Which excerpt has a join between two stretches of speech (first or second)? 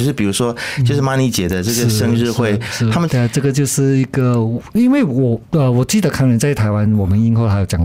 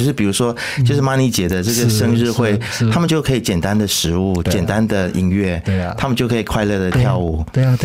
first